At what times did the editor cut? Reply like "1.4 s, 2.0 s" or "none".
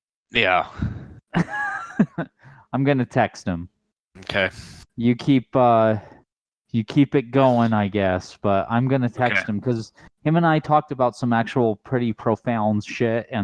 none

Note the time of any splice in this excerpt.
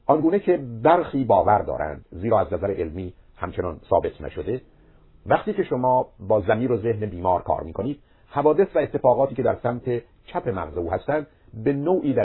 none

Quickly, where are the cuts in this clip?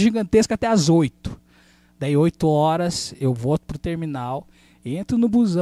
none

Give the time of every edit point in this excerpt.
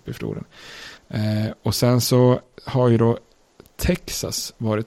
1.0 s

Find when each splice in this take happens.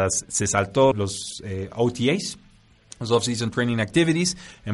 0.9 s

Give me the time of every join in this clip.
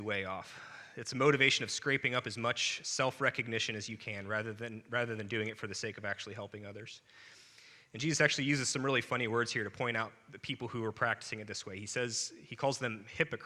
none

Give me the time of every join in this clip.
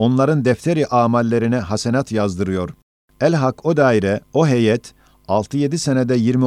3.0 s

